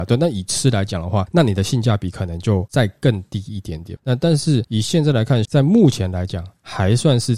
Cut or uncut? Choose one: cut